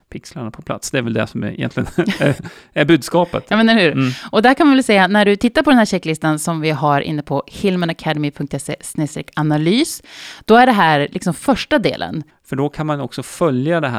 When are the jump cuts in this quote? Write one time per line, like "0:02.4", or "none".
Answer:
0:12.3